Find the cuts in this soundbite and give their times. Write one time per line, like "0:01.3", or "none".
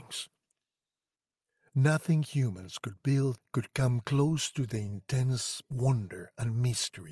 none